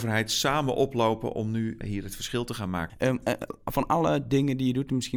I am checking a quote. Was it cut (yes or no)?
yes